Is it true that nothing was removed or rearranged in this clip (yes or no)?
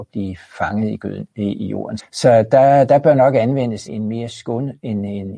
no